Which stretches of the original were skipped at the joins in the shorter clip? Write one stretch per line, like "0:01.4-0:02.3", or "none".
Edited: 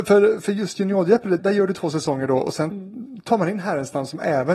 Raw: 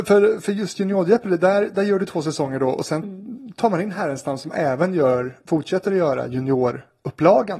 0:01.4-0:01.7